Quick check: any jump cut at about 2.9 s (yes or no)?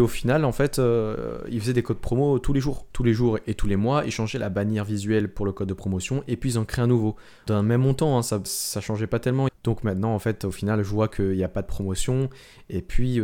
no